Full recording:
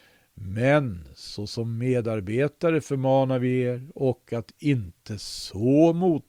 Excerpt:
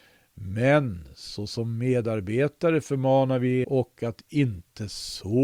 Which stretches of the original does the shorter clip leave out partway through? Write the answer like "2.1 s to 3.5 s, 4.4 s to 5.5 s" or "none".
3.6 s to 3.9 s